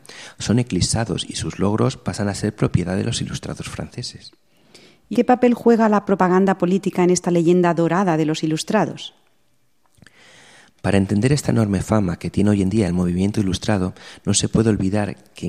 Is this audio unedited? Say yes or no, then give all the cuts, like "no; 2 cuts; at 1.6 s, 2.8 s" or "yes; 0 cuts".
no; 1 cut; at 5.1 s